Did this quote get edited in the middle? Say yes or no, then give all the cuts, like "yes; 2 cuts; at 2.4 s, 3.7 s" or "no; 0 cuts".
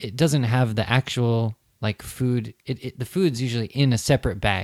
no; 0 cuts